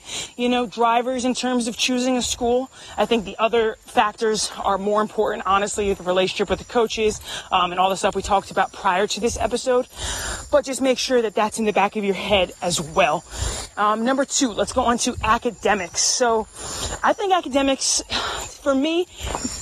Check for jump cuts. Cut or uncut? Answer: uncut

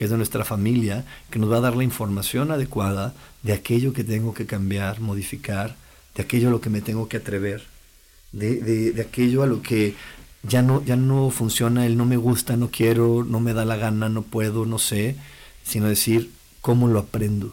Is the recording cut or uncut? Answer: uncut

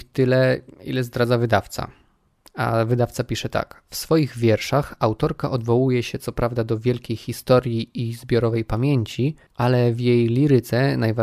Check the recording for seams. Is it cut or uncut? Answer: uncut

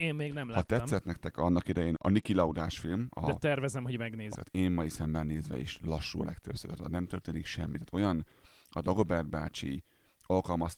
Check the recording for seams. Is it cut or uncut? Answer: cut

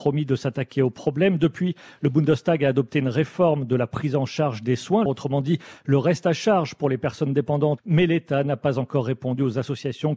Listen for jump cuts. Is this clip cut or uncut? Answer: cut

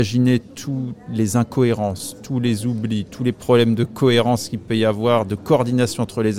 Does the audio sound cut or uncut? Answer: uncut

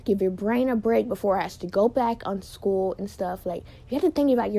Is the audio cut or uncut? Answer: uncut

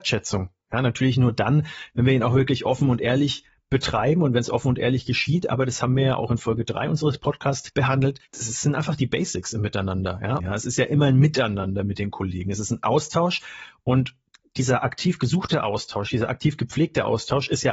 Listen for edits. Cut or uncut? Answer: cut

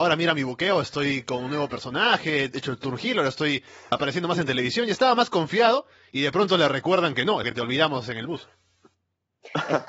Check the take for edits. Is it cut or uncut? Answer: cut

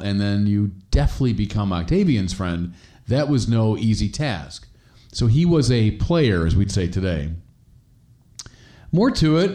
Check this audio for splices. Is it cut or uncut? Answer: uncut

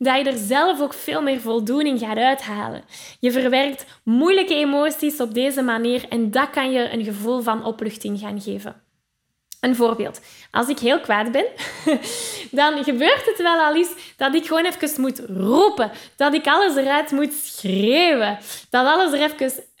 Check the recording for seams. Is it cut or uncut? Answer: uncut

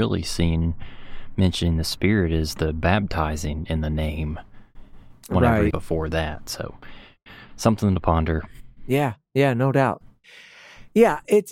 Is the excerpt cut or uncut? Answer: cut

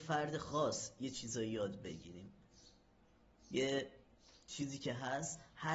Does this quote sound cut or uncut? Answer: uncut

